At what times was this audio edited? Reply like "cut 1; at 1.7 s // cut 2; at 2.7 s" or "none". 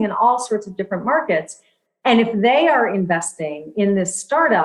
cut 1; at 2.0 s